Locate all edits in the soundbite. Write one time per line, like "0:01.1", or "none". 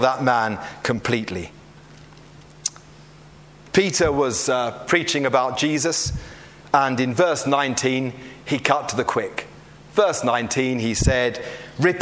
none